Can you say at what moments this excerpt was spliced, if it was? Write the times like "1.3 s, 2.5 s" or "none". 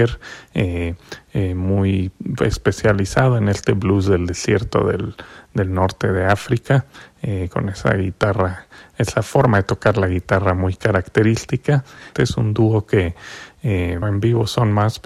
12.1 s, 14.0 s